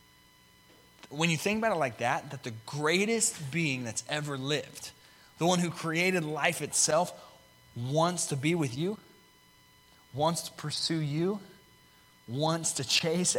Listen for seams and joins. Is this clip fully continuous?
yes; 0 cuts

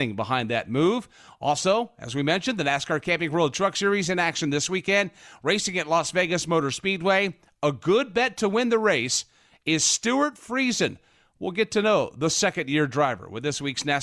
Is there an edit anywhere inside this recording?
no; 0 cuts

